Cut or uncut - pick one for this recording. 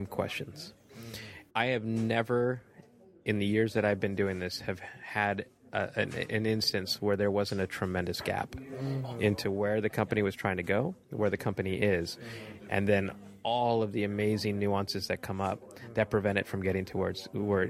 cut